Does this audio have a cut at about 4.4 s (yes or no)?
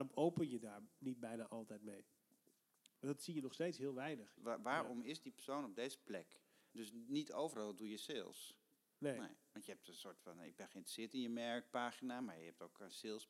yes